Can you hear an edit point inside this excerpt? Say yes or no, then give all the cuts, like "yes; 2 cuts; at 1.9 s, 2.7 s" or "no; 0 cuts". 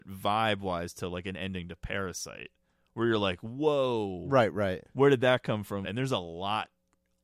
yes; 1 cut; at 5.8 s